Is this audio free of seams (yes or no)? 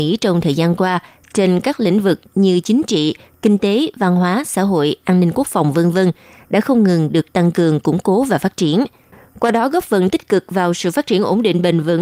yes